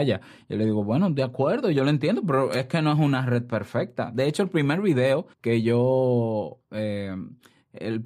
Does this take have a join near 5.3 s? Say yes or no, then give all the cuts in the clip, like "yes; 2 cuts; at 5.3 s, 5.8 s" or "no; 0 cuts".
yes; 1 cut; at 5.3 s